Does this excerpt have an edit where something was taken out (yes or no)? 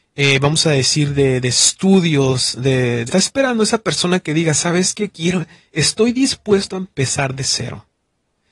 yes